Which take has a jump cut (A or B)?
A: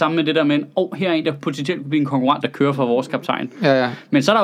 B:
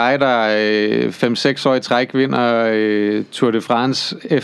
A